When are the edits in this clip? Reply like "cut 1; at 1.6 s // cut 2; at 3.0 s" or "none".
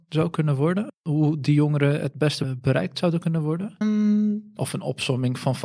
cut 1; at 3.8 s

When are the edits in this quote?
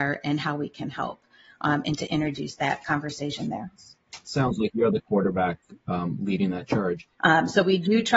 cut 1; at 7.2 s

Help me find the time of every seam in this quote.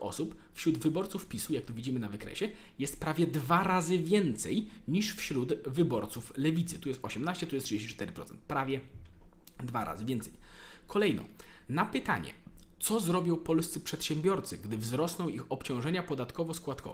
none

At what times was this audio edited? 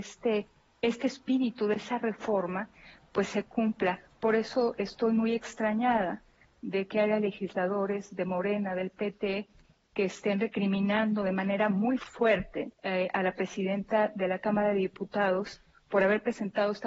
cut 1; at 12.7 s

